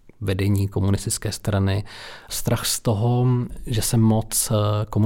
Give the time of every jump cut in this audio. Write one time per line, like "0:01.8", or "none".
none